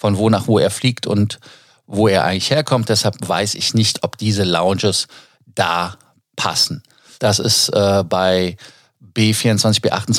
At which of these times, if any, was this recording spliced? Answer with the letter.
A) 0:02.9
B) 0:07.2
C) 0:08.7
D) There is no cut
B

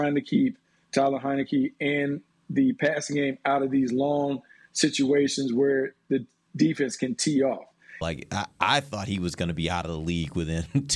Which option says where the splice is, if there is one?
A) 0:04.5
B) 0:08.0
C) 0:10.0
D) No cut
B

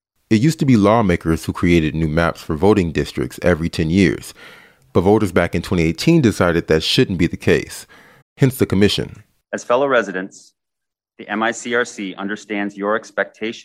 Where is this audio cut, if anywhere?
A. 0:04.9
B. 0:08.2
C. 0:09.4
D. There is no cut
B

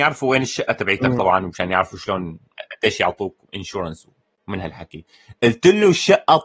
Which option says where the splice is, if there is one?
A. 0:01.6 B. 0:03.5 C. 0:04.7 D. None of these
B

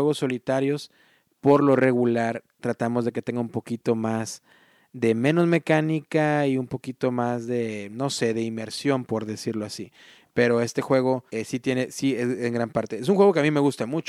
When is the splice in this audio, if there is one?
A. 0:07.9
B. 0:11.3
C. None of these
B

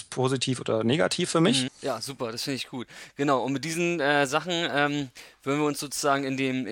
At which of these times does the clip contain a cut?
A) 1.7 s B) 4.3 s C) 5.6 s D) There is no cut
A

